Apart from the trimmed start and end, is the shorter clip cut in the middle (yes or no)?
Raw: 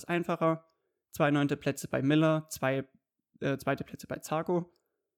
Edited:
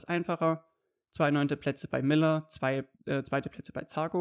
yes